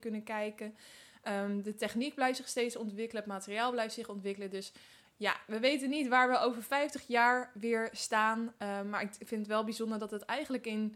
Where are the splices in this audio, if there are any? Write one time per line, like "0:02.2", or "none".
none